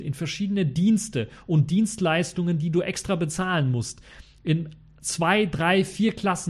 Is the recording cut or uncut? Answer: uncut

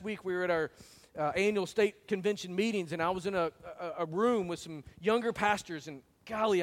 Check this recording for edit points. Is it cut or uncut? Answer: uncut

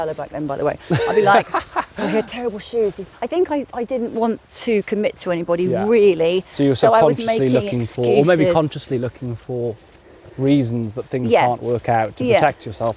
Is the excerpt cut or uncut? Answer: cut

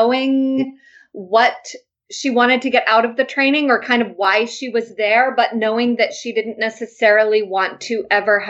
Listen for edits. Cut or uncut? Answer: uncut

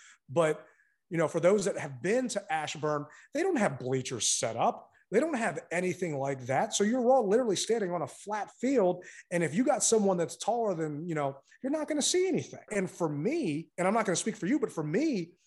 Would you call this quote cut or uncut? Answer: cut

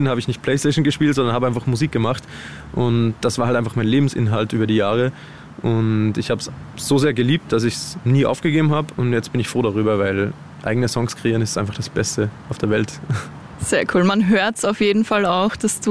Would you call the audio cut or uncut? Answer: uncut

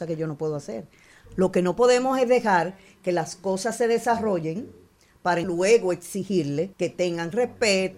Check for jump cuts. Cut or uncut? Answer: cut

